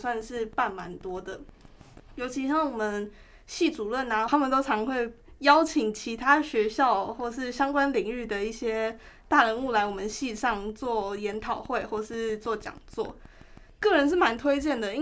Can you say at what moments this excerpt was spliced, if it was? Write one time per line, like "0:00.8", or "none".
0:04.3